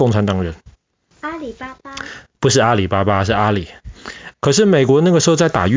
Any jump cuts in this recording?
yes; 2 cuts; at 1.1 s, 4.3 s

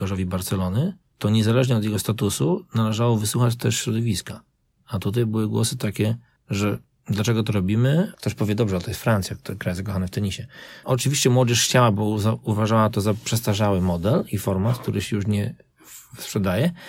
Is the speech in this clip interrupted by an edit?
yes; 2 cuts; at 8.1 s, 10.8 s

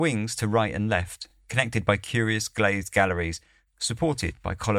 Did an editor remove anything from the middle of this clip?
no; 0 cuts

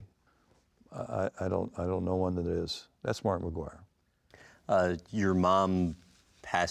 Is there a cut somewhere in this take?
no; 0 cuts

